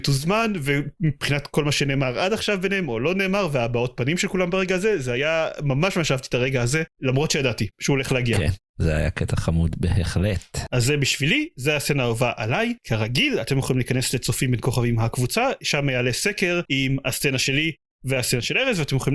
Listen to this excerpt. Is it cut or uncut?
uncut